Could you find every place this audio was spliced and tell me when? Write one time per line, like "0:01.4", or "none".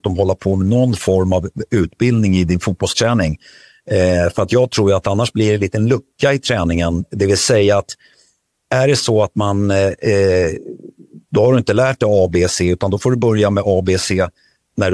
0:11.3